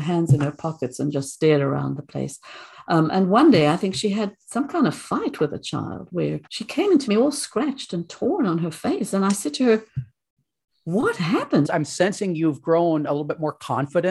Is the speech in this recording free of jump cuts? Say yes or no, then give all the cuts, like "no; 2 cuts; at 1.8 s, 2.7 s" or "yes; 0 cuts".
no; 2 cuts; at 6.5 s, 11.6 s